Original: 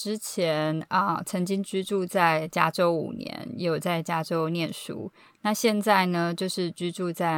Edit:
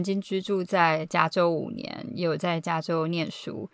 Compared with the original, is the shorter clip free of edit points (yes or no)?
yes